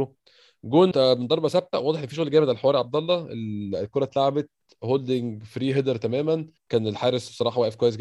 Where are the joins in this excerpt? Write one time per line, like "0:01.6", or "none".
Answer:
0:00.9
0:06.6